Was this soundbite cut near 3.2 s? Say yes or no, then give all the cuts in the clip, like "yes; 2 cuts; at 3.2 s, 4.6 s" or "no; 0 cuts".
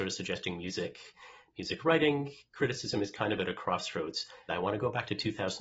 no; 1 cut; at 4.5 s